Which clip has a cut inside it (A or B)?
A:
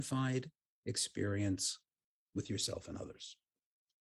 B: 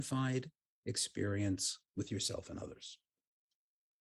B